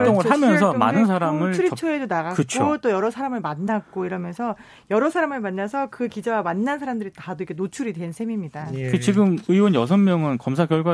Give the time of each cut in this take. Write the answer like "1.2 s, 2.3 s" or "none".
none